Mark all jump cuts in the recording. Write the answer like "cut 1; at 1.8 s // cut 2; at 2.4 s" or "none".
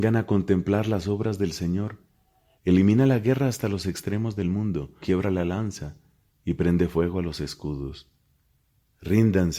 cut 1; at 2.6 s // cut 2; at 5.0 s